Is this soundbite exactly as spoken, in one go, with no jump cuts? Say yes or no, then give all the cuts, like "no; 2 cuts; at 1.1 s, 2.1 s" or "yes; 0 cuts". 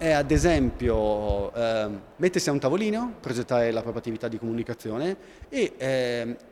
no; 1 cut; at 2.1 s